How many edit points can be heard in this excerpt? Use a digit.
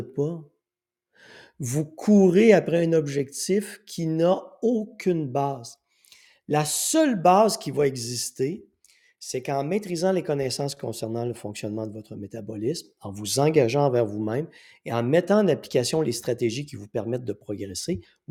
0